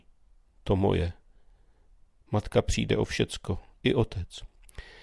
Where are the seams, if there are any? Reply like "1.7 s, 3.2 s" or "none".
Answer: none